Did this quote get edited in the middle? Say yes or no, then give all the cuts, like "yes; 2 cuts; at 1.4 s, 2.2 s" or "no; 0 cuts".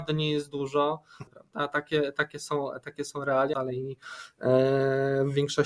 yes; 2 cuts; at 1.3 s, 3.5 s